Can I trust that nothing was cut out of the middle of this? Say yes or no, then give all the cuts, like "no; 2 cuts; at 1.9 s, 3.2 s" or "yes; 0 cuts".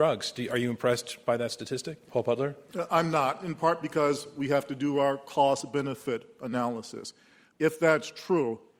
yes; 0 cuts